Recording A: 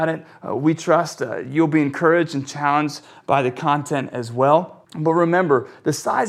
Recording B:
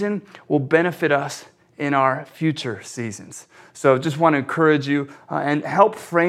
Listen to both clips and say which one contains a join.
A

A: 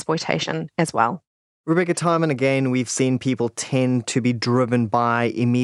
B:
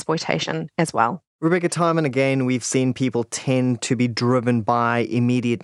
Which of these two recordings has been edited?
B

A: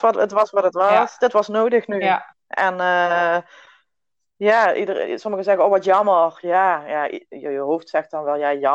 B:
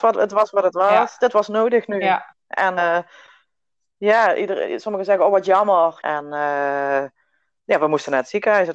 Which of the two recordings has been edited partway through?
B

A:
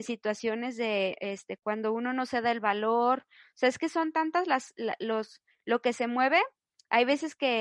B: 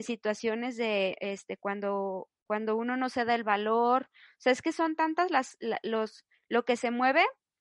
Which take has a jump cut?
A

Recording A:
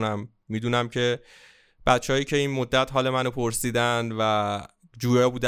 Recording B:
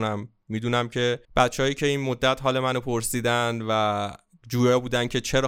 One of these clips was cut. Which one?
B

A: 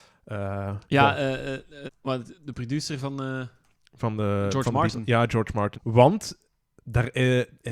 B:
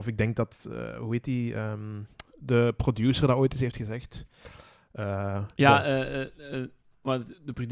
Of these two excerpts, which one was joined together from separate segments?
A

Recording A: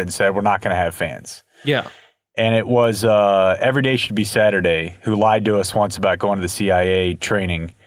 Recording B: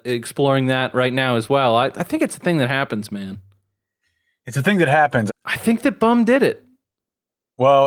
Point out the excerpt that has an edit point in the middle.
B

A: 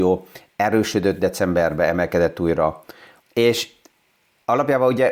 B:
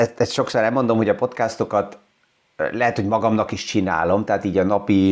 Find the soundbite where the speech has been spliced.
A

